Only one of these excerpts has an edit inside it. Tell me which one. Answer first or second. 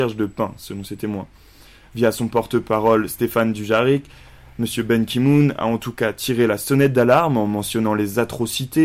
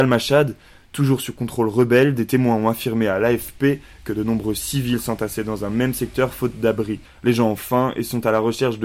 second